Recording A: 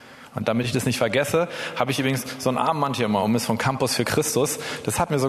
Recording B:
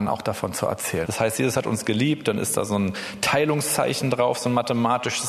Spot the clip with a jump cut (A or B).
B